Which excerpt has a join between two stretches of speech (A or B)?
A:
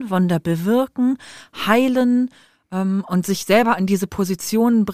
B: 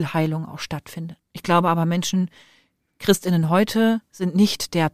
B